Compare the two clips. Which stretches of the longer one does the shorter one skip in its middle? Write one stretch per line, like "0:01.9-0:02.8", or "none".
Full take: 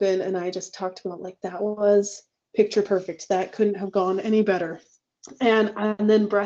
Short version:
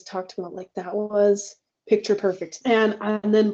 0:03.3-0:05.4

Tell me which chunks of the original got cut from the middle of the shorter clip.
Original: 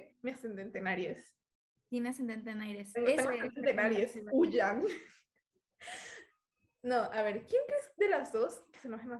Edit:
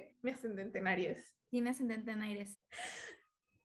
0:01.4-0:01.8
0:02.9-0:05.6

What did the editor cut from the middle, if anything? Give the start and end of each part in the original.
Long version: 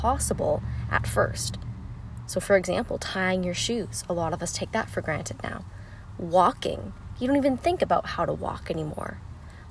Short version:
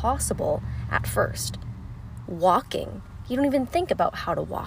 0:02.3-0:06.2

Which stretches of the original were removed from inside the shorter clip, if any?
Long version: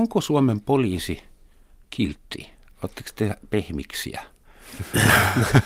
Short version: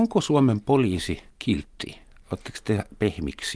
0:01.3-0:01.8

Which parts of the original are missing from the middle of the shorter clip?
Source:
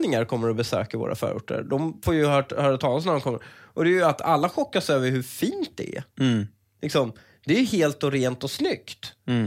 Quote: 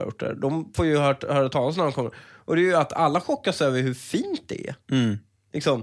none

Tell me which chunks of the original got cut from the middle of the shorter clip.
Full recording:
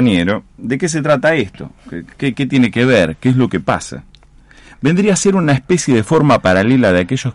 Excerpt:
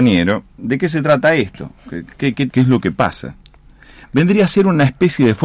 0:02.5-0:03.2

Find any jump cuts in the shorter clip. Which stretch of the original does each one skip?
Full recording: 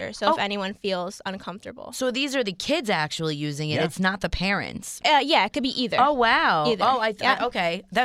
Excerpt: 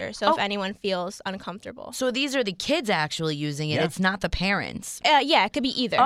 none

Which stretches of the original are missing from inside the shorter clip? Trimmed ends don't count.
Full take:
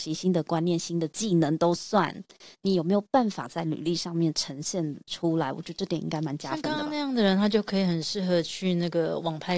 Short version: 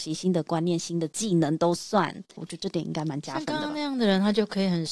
0:02.4-0:05.5

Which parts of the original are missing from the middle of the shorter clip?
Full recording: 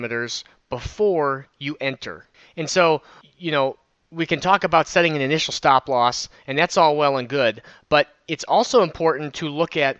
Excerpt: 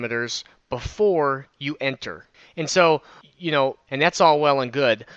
0:03.9-0:06.4

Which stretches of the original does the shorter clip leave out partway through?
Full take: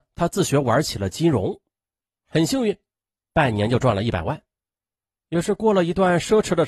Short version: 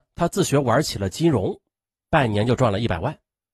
0:01.9-0:03.1

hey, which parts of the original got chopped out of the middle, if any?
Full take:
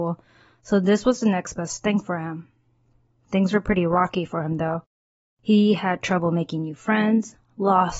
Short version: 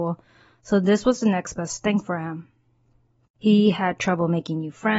0:03.2-0:05.3

